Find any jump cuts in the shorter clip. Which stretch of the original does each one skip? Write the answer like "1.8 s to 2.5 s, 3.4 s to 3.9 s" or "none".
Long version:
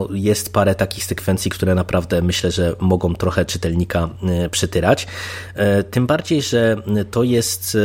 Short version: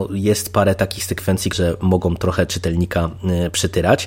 1.5 s to 2.5 s